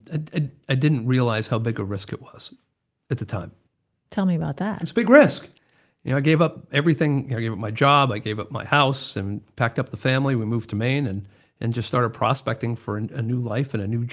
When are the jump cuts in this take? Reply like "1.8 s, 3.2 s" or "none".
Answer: none